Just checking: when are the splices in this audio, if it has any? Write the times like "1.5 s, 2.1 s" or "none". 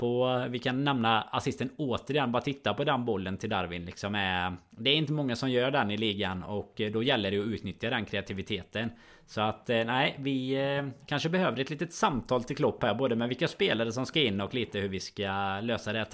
none